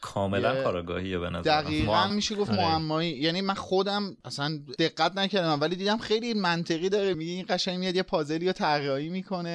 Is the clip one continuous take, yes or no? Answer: no